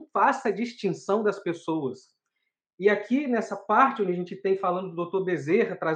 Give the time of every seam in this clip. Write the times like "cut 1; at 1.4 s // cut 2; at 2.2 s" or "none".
none